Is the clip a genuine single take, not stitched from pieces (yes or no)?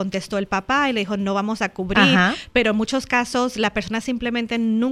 yes